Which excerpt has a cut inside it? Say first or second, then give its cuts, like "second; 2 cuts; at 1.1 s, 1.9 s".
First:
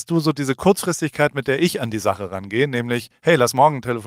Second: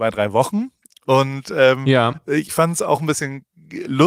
second; 1 cut; at 2.5 s